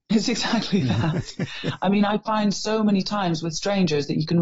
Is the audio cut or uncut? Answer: uncut